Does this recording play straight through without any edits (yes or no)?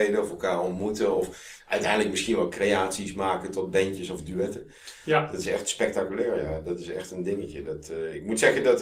yes